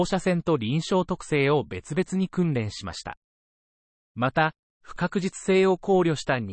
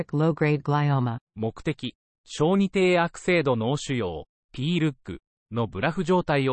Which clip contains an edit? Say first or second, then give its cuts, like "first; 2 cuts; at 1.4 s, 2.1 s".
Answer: second; 1 cut; at 1.3 s